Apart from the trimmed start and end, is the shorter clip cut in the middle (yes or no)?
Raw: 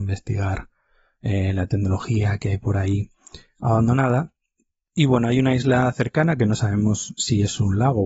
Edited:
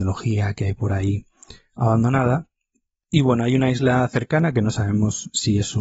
no